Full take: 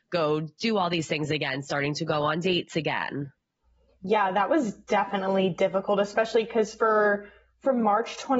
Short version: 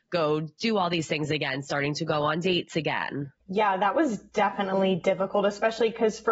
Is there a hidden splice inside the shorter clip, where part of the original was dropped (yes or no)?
yes